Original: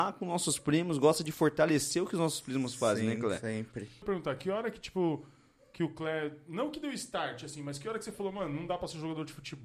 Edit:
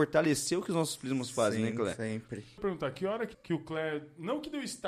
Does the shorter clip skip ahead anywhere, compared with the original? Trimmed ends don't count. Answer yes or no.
yes